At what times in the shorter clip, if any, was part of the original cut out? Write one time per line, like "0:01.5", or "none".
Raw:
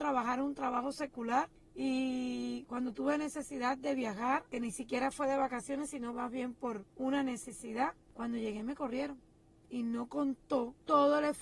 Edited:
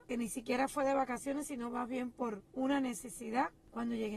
none